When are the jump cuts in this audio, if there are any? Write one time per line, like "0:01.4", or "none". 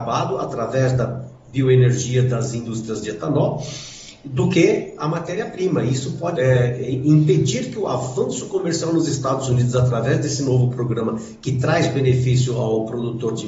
0:06.4